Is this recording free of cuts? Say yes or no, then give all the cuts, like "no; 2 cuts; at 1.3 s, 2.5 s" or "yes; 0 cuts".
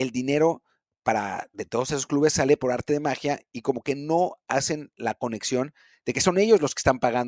yes; 0 cuts